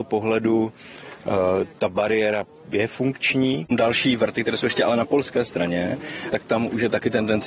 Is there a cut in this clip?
yes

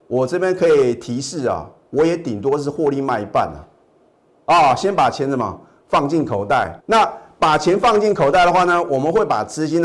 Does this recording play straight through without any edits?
no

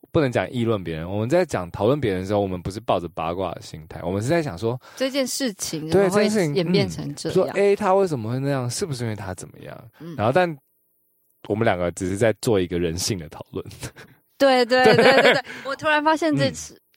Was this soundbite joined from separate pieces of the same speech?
no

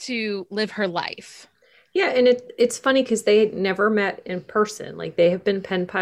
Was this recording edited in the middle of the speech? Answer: no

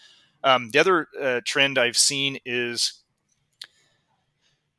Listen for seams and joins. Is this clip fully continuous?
yes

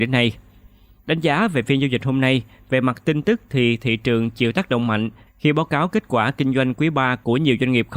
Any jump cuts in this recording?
no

